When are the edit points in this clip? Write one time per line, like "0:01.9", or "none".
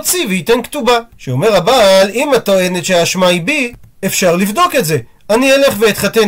0:01.1

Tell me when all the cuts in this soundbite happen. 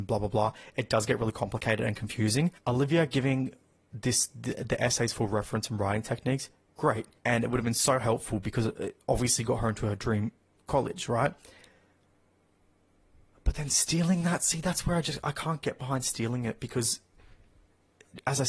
0:07.2

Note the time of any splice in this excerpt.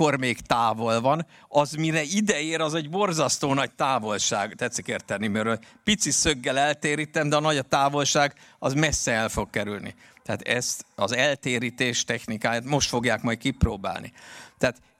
none

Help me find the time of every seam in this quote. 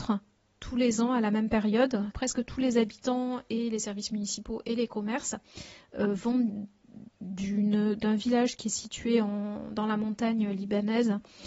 0:02.1

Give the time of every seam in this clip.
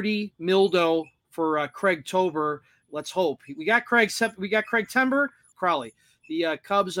0:05.5

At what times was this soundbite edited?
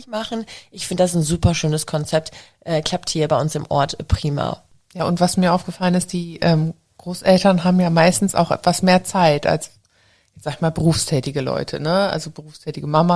none

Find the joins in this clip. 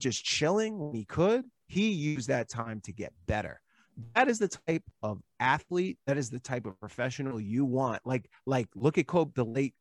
0:06.0

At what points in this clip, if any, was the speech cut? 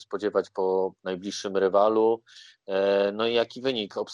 none

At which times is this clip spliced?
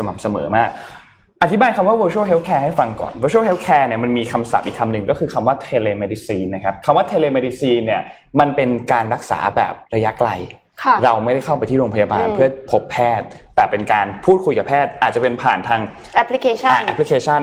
0:09.8

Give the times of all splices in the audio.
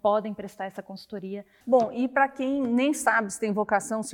0:01.6

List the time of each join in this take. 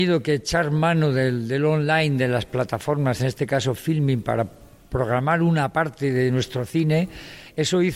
none

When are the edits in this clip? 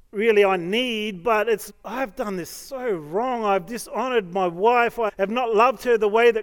0:01.7
0:05.1

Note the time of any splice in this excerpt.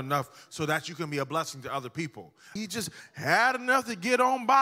0:02.6

